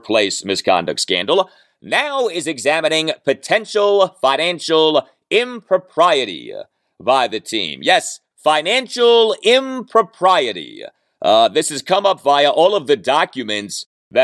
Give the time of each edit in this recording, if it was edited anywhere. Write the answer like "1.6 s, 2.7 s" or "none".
none